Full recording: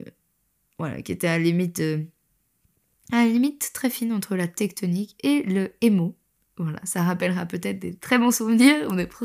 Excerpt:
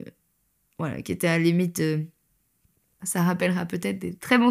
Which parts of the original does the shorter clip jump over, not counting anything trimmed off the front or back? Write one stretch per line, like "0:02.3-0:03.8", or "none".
0:03.0-0:06.8